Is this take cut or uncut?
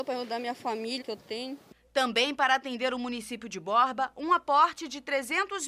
cut